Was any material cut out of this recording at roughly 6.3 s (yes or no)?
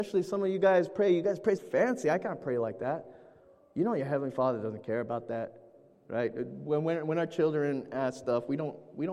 no